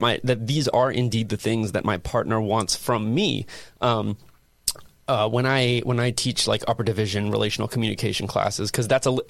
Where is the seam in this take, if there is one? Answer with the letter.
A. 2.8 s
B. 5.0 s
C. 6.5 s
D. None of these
D